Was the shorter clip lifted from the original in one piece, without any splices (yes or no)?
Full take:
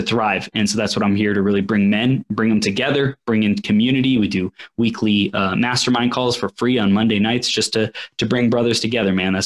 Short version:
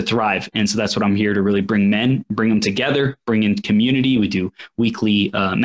yes